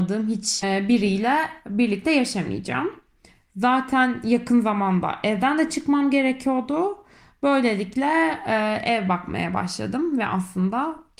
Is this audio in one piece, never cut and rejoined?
yes; 0 cuts

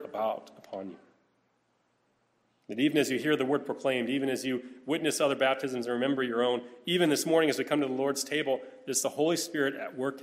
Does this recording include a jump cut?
no; 0 cuts

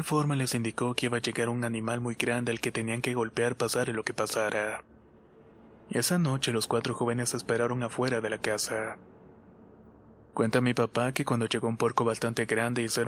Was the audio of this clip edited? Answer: no; 0 cuts

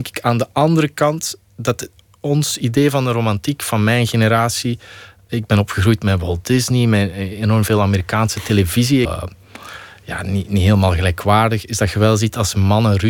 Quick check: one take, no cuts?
no; 1 cut; at 9.0 s

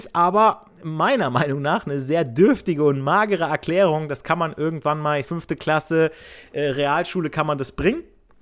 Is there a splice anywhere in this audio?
yes; 1 cut; at 5.2 s

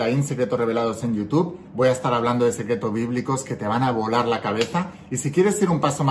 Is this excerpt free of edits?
yes; 0 cuts

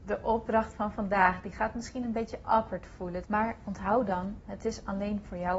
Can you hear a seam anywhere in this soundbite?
yes; 1 cut; at 3.2 s

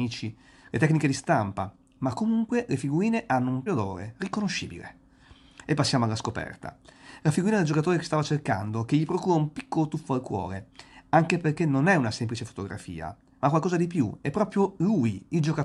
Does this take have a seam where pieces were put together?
yes; 1 cut; at 3.7 s

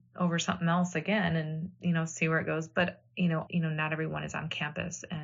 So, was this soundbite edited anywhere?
yes; 1 cut; at 3.5 s

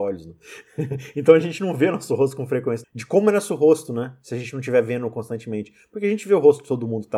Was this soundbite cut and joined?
yes; 1 cut; at 2.8 s

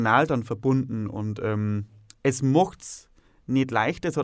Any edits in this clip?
no; 0 cuts

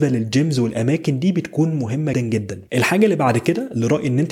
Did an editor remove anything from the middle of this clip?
yes; 1 cut; at 2.1 s

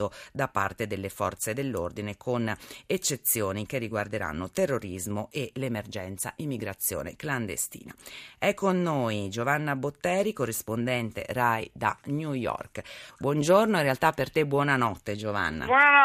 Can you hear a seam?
no; 0 cuts

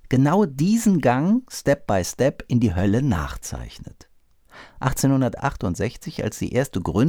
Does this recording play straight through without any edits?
yes; 0 cuts

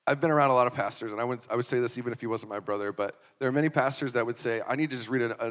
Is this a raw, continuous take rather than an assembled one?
yes; 0 cuts

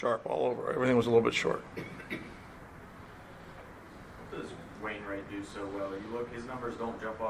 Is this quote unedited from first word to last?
yes; 0 cuts

